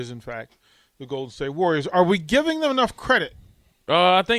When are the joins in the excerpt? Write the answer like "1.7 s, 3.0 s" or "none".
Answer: none